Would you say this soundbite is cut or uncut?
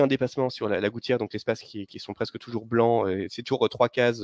cut